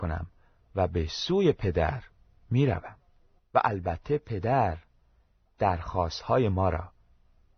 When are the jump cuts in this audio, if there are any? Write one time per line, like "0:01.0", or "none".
0:03.4